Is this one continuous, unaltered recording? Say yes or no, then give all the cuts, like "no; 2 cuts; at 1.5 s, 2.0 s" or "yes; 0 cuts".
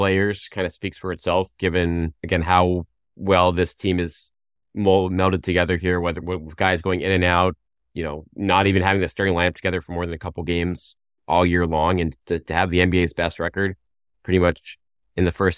no; 1 cut; at 2.2 s